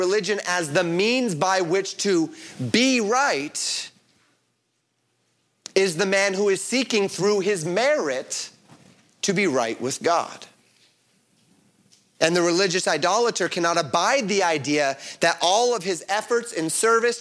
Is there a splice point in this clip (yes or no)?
no